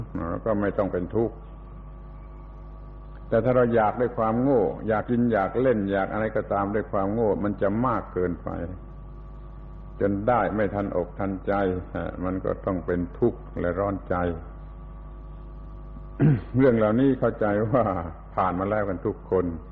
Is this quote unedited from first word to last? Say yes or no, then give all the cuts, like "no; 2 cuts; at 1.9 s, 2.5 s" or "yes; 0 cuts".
no; 1 cut; at 5.0 s